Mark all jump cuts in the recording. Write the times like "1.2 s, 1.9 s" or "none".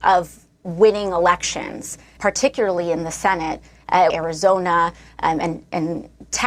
2.2 s, 4.1 s